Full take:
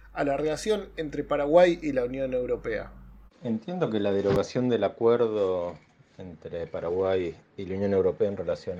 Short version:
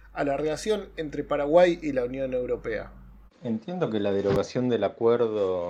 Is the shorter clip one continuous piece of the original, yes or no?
yes